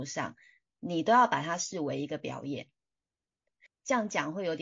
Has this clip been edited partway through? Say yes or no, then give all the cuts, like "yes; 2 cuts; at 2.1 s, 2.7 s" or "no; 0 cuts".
yes; 1 cut; at 3.7 s